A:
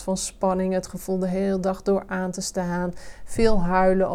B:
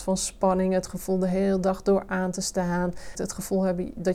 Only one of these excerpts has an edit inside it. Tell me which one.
B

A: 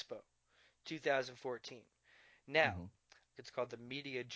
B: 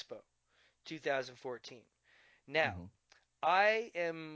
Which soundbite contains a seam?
A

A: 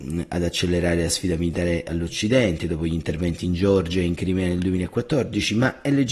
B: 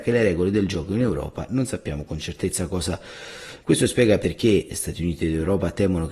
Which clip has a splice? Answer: B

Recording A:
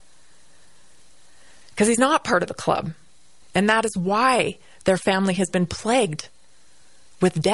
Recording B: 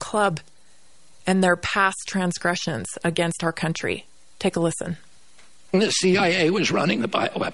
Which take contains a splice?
A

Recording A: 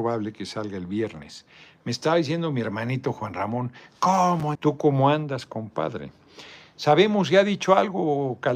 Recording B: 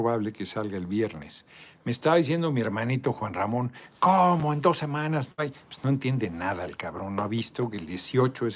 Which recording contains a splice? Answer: A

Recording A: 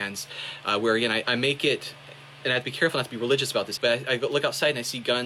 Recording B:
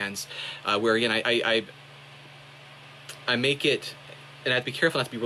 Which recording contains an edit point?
A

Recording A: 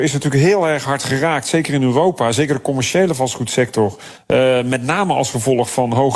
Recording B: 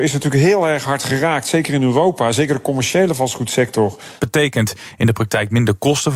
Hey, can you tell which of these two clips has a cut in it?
B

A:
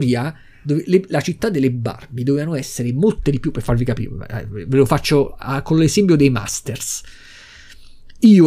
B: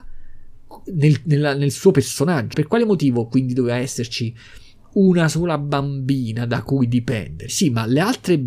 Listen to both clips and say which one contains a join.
B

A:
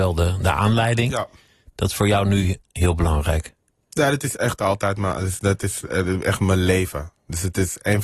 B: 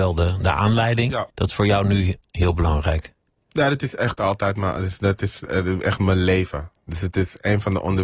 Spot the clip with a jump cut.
B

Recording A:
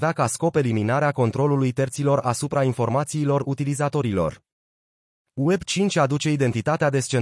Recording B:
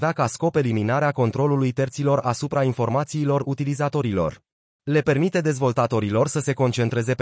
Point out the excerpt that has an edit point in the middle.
B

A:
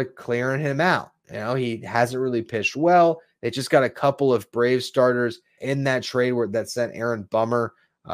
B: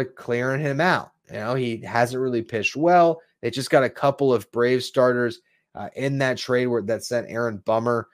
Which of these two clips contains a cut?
A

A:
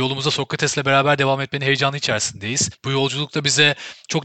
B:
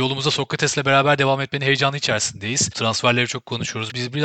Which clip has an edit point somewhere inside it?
B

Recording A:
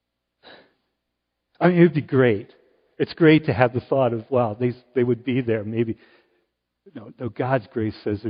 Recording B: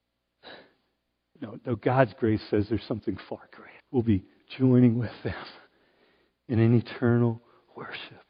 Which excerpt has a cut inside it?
B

